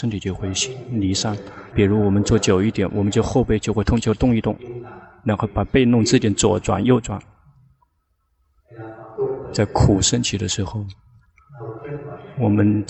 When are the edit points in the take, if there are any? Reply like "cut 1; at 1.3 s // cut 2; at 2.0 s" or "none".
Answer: cut 1; at 1.7 s